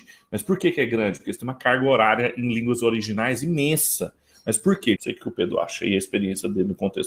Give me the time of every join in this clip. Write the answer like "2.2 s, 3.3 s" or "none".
5.0 s